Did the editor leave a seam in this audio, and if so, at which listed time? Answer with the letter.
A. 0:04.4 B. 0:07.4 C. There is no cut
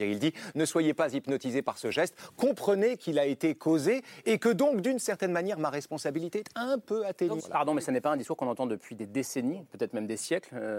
B